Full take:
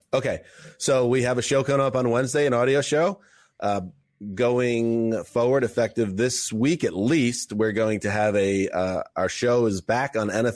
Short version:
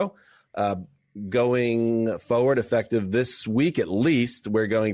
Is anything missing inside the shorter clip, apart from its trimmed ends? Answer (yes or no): no